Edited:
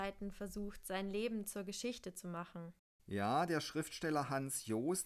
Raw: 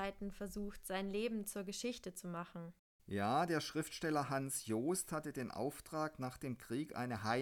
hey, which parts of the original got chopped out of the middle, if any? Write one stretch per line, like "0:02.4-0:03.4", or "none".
none